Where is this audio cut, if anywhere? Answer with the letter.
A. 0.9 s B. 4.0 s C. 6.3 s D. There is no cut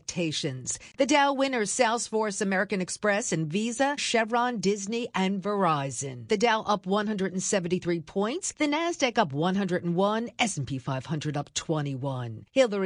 B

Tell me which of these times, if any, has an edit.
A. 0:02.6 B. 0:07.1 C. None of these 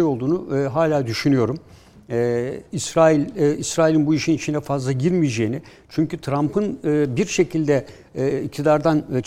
C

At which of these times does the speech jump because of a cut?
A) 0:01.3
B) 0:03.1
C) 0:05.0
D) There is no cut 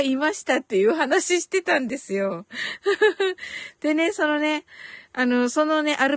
D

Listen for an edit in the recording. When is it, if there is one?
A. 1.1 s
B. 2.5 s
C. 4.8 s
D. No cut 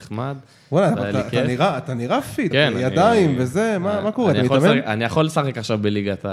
B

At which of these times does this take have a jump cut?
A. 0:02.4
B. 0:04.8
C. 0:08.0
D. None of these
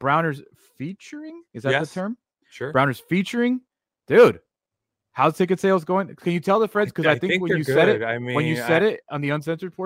D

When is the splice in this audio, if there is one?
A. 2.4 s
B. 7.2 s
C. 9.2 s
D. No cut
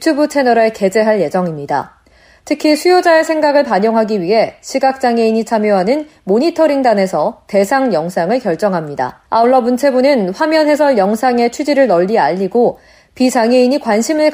C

